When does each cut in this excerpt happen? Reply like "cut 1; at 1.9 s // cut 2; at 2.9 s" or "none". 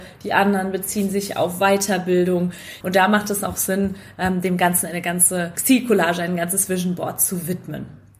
cut 1; at 2.8 s